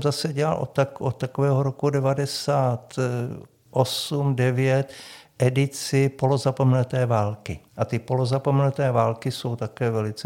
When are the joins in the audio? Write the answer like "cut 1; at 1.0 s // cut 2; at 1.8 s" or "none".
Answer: cut 1; at 7.7 s